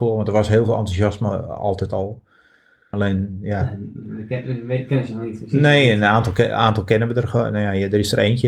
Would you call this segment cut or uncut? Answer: cut